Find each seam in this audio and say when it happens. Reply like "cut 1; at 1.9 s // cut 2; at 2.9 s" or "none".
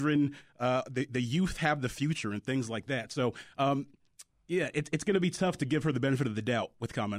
none